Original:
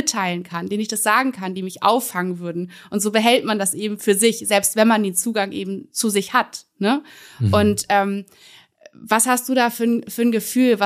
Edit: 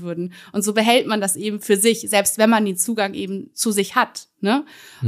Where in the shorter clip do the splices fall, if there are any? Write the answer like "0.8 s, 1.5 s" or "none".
none